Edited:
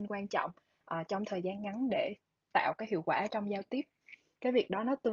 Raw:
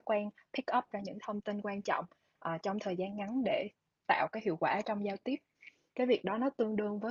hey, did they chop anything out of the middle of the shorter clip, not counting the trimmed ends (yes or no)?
no